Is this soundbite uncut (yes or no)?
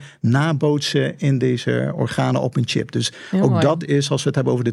yes